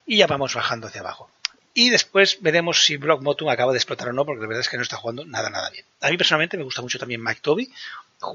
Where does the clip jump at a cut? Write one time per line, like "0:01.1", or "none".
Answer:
0:01.6